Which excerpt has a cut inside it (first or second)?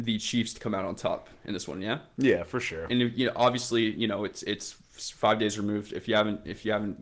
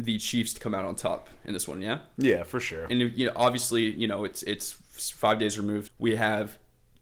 second